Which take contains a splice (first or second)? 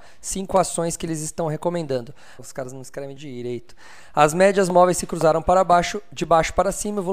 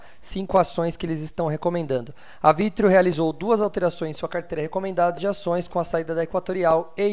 first